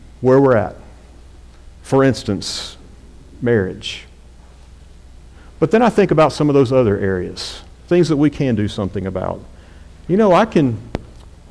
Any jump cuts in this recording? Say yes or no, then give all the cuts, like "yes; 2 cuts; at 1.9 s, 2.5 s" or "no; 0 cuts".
no; 0 cuts